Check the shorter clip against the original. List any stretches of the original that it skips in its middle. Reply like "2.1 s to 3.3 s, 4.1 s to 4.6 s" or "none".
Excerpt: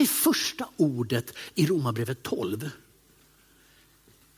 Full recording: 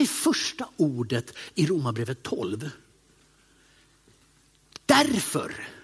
none